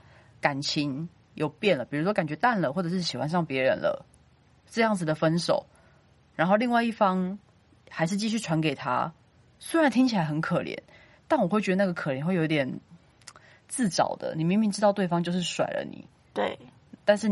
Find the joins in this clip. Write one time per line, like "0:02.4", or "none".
none